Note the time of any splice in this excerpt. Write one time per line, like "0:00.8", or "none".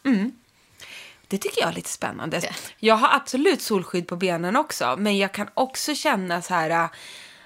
0:02.4